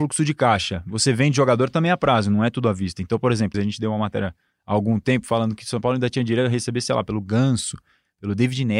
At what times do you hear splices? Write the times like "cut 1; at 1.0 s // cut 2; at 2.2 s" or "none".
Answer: cut 1; at 3.5 s